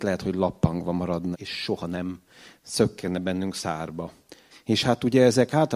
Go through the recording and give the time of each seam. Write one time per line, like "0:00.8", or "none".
0:01.3
0:04.5